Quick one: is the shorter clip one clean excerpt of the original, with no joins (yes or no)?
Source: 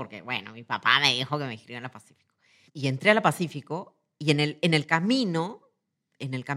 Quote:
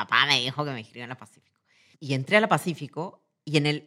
yes